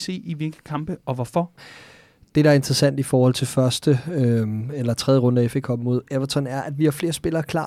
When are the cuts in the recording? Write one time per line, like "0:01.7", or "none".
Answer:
0:01.6